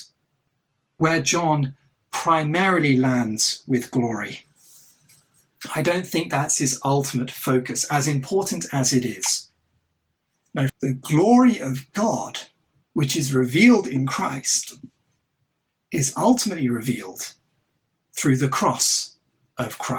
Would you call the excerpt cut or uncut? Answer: cut